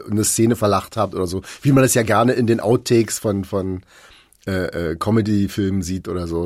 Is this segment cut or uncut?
uncut